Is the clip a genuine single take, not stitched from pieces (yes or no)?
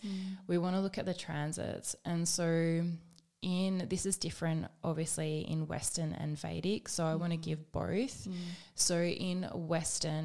yes